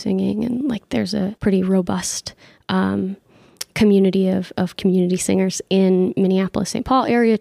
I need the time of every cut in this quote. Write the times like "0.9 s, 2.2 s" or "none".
1.4 s